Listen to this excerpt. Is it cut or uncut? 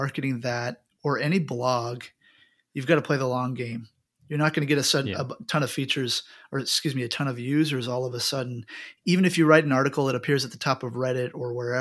uncut